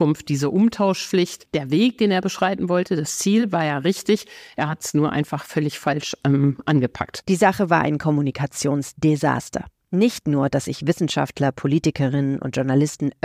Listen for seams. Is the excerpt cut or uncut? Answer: uncut